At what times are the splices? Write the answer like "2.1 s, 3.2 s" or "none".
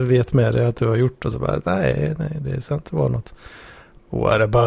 none